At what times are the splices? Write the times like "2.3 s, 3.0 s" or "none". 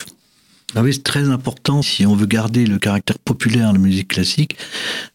1.8 s